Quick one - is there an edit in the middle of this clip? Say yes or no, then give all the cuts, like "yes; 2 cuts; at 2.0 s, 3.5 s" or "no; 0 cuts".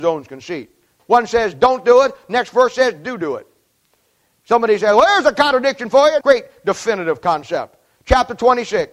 yes; 2 cuts; at 1.0 s, 6.2 s